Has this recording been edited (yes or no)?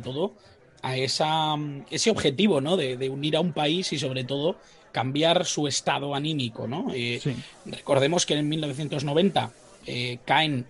no